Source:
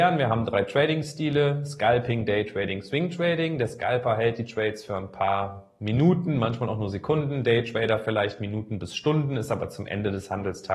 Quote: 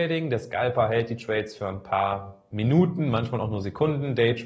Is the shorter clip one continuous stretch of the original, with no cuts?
yes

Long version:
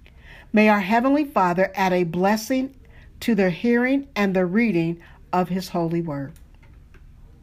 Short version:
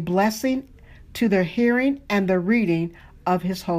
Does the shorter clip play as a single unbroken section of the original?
yes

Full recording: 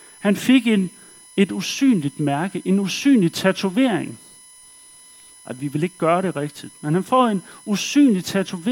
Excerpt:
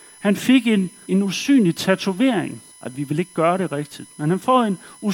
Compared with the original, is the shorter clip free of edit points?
no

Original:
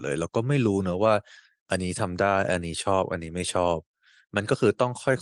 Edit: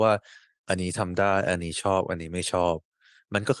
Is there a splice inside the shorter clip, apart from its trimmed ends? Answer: no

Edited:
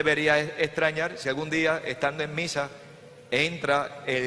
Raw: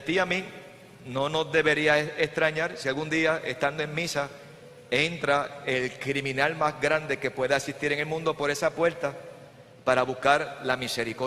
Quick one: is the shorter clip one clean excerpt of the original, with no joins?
yes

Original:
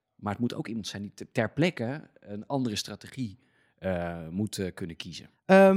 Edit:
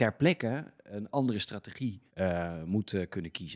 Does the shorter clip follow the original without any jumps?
no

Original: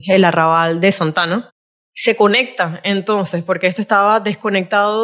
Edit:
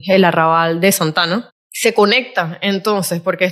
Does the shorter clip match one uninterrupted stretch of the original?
no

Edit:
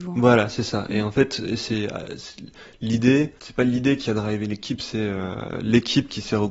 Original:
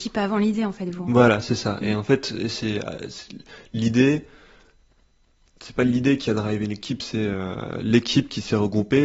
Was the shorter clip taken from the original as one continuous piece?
no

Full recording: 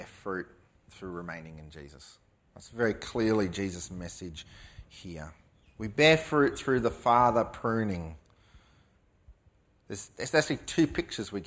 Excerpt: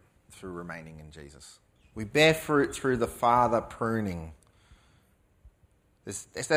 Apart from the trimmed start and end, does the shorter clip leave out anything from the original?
yes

